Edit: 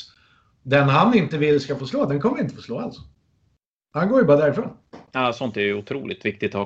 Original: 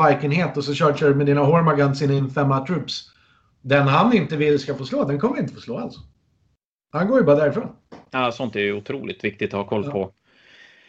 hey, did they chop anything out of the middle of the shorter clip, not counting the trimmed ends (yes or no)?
no